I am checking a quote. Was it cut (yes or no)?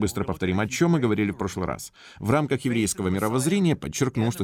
no